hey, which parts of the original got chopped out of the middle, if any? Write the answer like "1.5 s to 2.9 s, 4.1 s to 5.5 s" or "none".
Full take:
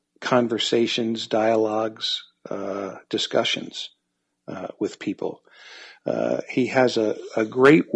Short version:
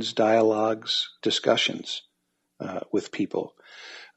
2.3 s to 3.1 s